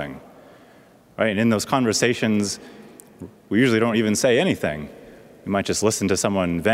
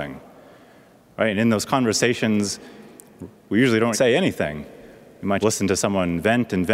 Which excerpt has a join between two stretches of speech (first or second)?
second